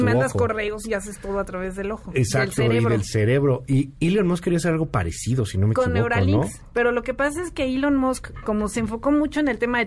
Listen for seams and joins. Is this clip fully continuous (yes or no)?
yes